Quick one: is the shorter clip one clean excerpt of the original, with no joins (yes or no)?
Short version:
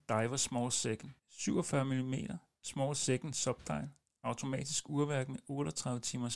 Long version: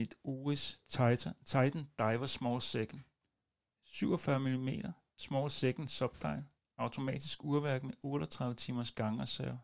no